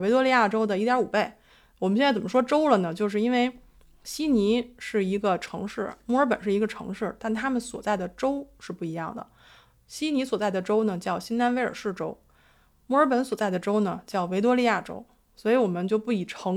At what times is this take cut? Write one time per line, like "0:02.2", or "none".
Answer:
none